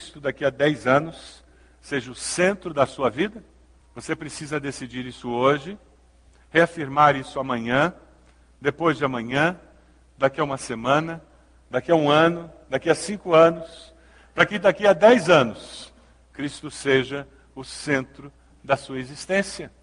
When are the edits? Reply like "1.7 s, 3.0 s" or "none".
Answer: 3.8 s